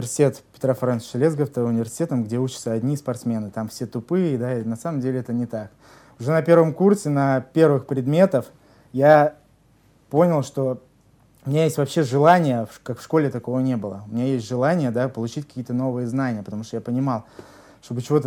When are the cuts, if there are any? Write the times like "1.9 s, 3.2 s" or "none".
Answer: none